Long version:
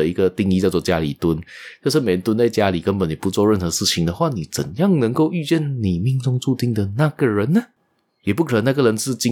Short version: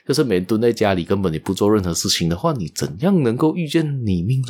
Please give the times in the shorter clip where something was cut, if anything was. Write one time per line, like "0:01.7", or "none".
none